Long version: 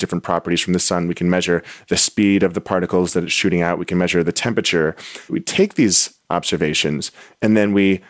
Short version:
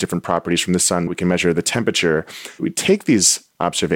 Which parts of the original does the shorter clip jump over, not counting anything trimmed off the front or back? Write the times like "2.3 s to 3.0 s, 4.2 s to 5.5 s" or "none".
1.1 s to 3.8 s